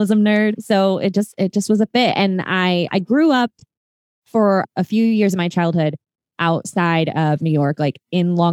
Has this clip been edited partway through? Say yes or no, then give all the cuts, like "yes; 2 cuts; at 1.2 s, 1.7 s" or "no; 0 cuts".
no; 0 cuts